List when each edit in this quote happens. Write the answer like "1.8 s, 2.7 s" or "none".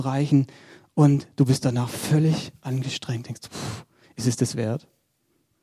4.5 s